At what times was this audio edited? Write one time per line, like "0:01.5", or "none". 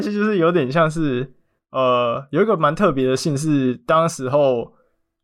none